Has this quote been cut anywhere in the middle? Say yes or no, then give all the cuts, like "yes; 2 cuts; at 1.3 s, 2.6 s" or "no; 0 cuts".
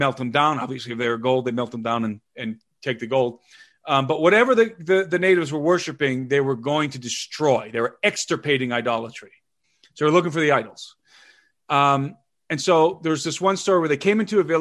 no; 0 cuts